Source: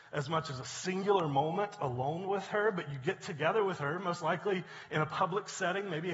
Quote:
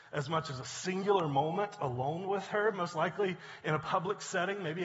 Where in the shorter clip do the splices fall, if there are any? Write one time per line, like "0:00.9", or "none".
0:02.7

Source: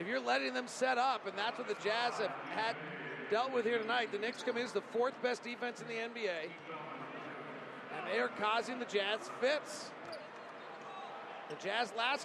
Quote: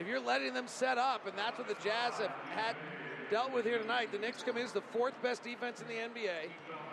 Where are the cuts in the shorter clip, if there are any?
none

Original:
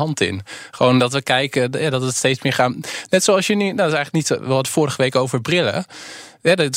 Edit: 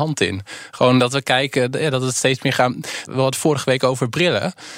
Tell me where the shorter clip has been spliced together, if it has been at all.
0:03.1

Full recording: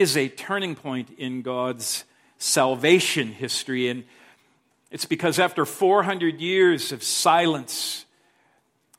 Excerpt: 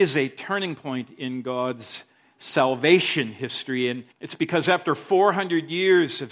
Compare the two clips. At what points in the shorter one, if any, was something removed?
0:04.1

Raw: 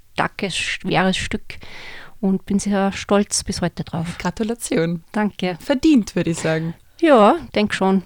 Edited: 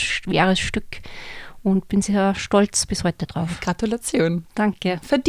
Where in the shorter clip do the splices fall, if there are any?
none

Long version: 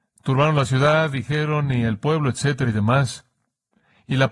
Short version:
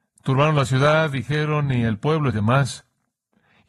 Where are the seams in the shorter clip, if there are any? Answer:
0:02.3

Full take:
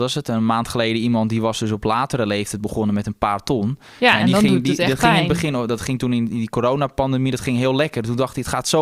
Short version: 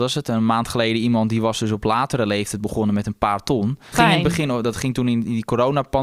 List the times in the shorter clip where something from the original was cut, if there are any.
0:03.9

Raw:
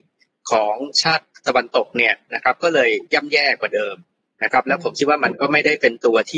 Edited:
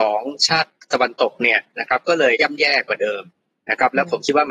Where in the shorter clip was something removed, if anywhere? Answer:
0:02.3

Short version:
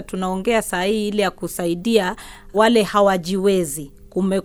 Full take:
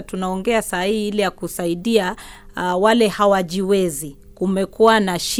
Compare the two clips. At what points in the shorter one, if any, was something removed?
0:02.5

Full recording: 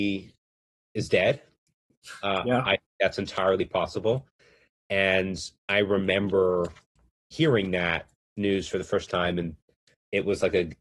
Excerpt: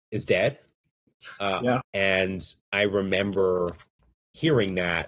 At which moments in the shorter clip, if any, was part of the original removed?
0:01.8

